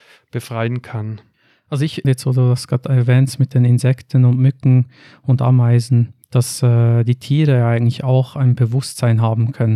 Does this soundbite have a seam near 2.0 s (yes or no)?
yes